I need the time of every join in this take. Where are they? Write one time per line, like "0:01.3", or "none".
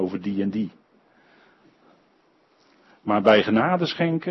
none